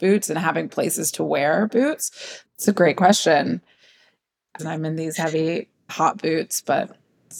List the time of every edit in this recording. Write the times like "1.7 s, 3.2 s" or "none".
2.5 s, 4.6 s, 5.9 s